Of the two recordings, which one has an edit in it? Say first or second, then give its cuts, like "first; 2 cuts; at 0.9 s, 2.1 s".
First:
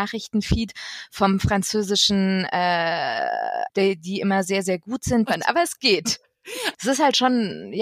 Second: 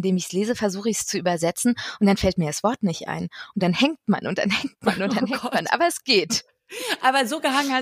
first; 3 cuts; at 3.7 s, 5.3 s, 6.7 s